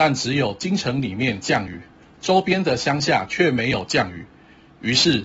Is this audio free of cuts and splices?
yes; 0 cuts

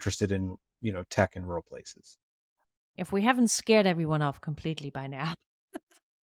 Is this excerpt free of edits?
no; 1 cut; at 3.0 s

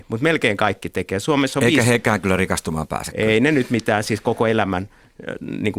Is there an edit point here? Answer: no; 0 cuts

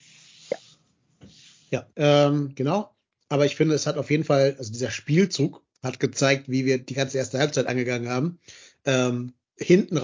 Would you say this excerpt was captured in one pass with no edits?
no; 1 cut; at 1.9 s

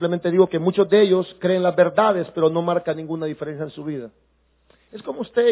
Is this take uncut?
yes; 0 cuts

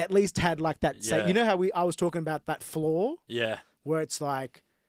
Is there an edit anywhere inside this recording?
no; 0 cuts

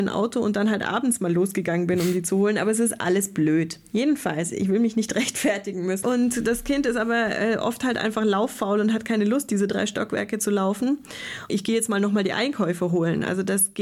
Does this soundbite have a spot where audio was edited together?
yes; 2 cuts; at 6.0 s, 11.5 s

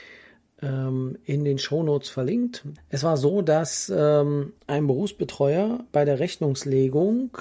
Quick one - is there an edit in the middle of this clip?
yes; 2 cuts; at 2.8 s, 4.6 s

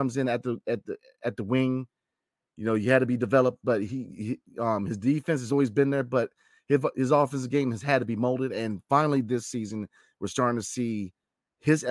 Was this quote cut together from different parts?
no; 0 cuts

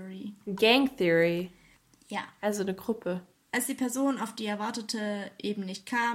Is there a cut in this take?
yes; 1 cut; at 3.3 s

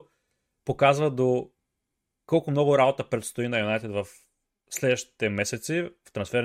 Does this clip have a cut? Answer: no; 0 cuts

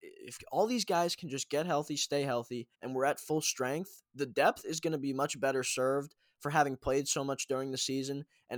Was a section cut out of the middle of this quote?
yes; 1 cut; at 2.7 s

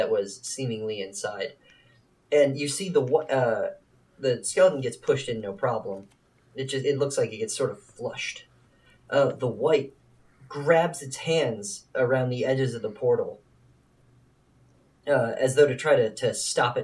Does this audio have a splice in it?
no; 0 cuts

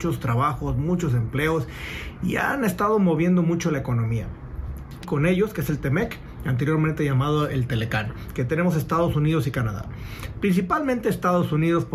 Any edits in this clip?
yes; 1 cut; at 5.0 s

